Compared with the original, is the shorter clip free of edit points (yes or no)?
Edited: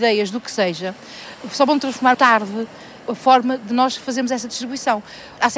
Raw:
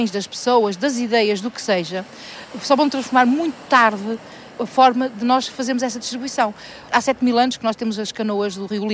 no